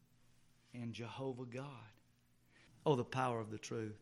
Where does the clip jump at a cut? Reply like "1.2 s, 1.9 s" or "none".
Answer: 2.7 s